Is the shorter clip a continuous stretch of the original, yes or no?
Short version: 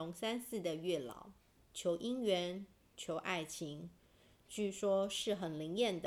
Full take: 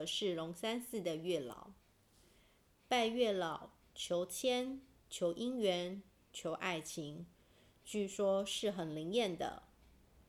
no